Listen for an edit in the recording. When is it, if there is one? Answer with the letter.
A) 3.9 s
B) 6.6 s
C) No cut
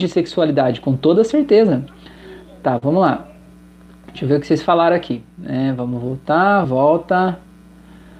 B